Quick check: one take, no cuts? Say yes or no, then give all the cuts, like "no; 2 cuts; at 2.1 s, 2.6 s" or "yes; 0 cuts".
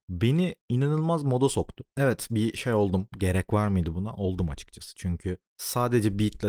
yes; 0 cuts